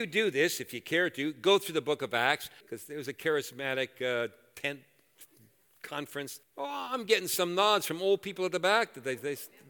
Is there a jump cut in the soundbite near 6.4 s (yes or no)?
yes